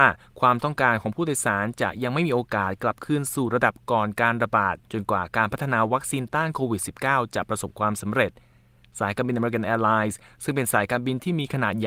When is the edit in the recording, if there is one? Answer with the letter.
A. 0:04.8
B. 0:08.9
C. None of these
A